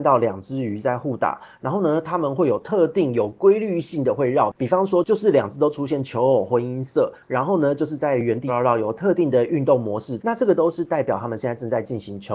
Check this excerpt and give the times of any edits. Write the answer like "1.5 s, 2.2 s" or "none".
8.5 s, 10.2 s